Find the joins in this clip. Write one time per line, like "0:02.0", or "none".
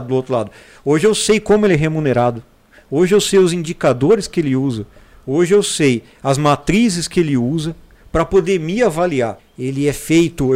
0:09.4